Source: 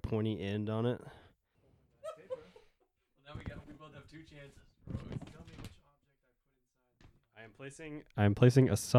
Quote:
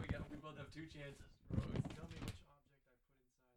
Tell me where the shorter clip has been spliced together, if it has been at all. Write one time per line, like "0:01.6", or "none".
none